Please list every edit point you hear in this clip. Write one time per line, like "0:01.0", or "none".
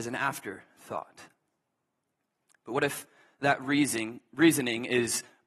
none